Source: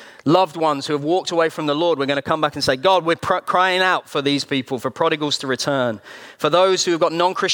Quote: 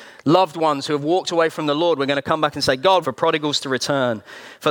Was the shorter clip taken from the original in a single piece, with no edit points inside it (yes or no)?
no